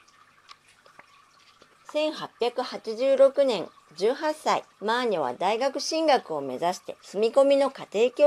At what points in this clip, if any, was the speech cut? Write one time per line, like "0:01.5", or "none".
0:01.7
0:04.7
0:07.0

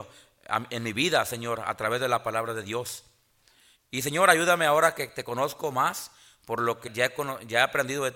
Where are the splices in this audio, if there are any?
0:03.8
0:06.9

